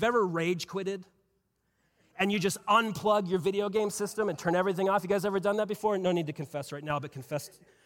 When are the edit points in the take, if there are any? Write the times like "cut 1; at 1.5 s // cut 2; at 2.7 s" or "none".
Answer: none